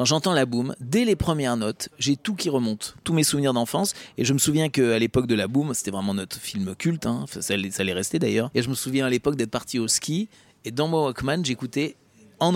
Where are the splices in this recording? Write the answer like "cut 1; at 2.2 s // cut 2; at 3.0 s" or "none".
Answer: cut 1; at 8.5 s